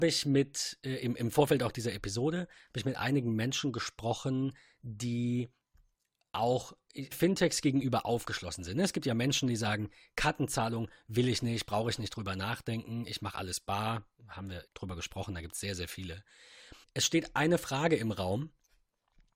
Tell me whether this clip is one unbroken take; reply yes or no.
no